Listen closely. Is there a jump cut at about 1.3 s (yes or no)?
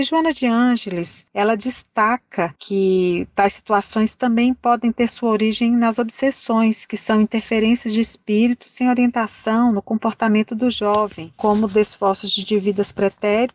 yes